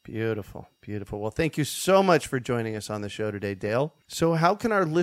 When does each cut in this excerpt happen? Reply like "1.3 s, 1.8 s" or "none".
4.0 s